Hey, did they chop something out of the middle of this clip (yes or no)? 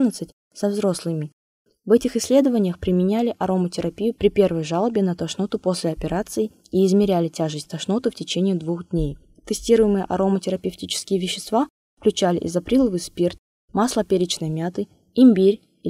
no